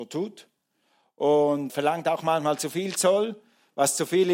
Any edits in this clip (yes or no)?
yes